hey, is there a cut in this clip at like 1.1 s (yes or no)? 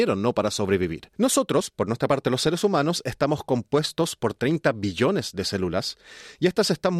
yes